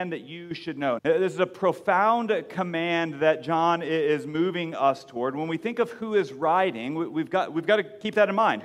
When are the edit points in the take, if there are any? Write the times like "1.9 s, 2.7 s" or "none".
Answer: 1.0 s